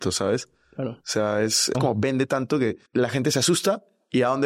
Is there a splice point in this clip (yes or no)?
yes